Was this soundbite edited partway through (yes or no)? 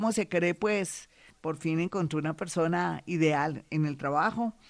yes